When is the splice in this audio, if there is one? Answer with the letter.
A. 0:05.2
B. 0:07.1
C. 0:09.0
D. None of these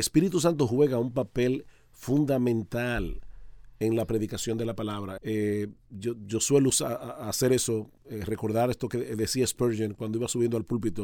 A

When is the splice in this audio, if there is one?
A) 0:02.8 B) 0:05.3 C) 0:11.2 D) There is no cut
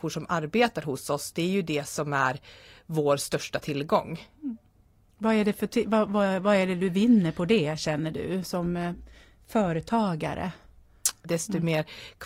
C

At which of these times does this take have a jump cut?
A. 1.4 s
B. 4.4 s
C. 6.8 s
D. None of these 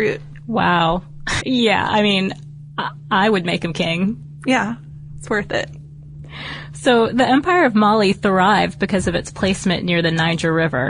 A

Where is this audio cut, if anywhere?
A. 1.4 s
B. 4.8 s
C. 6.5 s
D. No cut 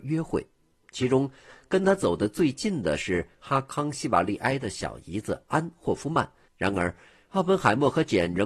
C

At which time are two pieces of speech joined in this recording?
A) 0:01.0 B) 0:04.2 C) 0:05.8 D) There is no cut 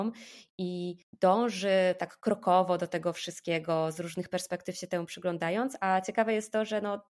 A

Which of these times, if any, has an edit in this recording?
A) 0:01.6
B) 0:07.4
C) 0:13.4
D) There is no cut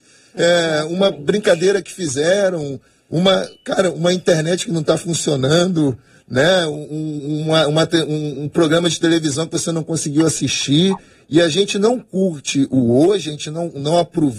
D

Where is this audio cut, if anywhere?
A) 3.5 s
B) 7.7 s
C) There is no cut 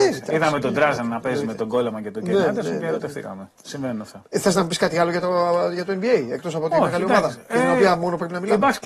A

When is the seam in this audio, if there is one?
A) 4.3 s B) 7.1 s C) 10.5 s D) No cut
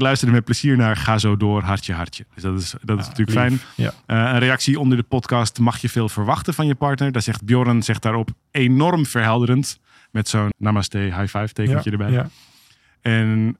C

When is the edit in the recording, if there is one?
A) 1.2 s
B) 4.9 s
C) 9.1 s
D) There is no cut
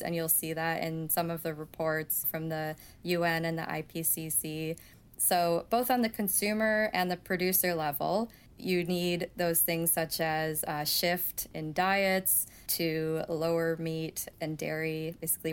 D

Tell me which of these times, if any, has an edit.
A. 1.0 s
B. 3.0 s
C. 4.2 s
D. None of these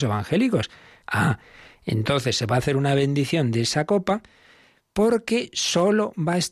A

